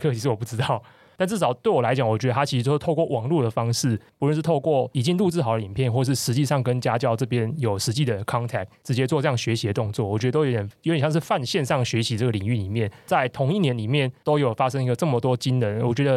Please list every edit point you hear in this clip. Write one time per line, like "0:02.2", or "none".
0:01.1